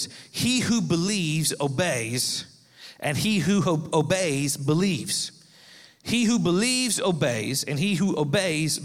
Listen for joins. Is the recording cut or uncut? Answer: uncut